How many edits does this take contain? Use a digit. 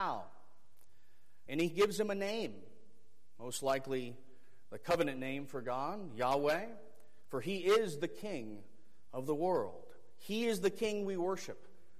1